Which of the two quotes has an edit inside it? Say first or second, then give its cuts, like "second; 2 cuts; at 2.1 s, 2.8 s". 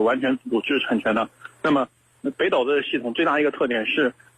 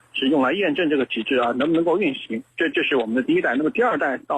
second; 1 cut; at 2.5 s